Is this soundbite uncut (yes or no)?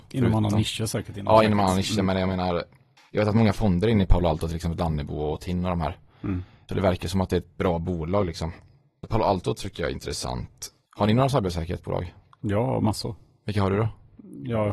yes